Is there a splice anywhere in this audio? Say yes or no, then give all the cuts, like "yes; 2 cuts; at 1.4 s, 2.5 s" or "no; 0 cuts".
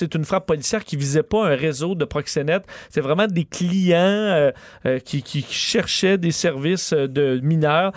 no; 0 cuts